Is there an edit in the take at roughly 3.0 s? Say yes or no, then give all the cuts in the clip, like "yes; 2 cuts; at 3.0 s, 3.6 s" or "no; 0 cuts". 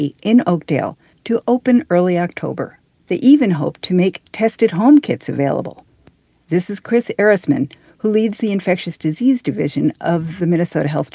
yes; 1 cut; at 3.0 s